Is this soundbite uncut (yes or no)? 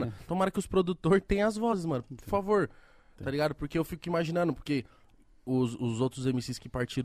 yes